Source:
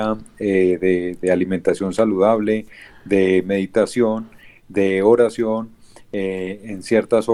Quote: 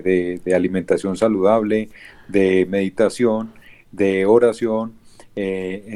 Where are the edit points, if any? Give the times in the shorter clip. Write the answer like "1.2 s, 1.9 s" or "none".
none